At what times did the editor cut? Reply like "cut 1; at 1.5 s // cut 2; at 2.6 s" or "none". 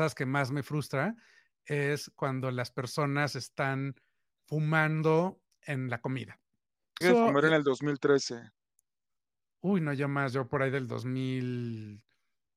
cut 1; at 7.0 s